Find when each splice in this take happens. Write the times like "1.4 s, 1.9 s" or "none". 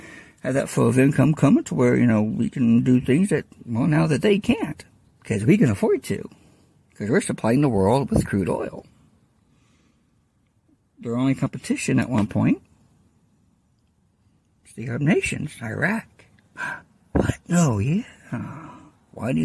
none

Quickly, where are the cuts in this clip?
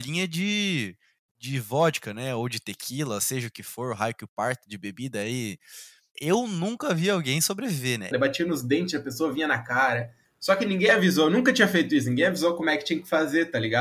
6.1 s, 8.1 s, 10.2 s

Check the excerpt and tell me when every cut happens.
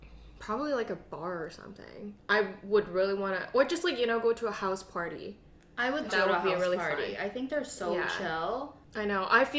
6.1 s

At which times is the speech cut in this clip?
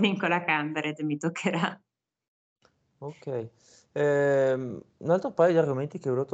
none

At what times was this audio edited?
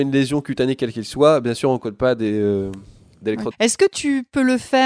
3.5 s

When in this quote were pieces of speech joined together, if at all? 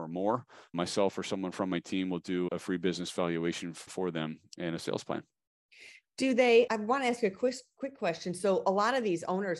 none

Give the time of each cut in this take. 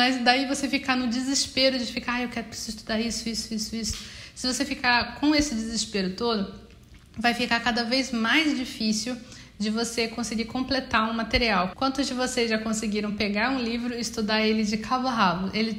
11.7 s

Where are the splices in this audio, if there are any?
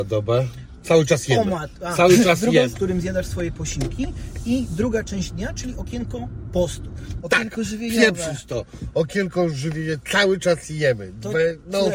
2.7 s, 7.2 s

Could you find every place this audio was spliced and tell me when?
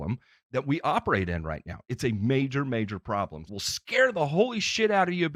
3.5 s

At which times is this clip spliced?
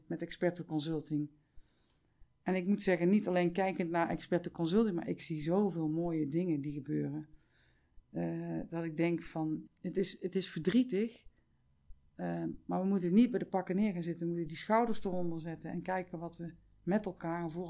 9.7 s

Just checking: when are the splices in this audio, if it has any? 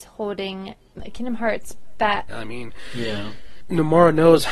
1.0 s, 2.3 s

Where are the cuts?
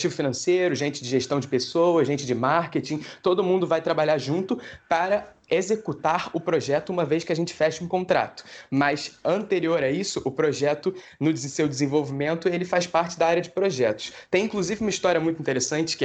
none

